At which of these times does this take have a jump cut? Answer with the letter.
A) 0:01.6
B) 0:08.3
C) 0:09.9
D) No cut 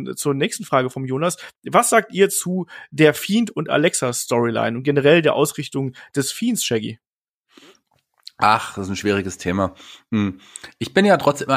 D